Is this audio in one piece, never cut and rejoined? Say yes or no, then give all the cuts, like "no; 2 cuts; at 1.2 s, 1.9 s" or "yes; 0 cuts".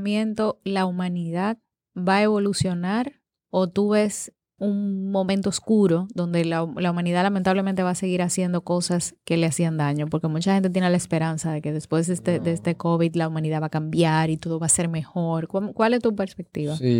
no; 1 cut; at 4.6 s